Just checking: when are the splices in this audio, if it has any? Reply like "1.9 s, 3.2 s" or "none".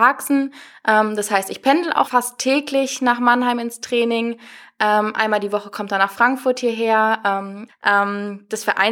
2.0 s, 7.7 s